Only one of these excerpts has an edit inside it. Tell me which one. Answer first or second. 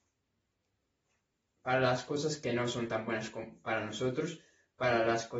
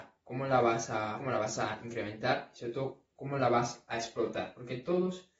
second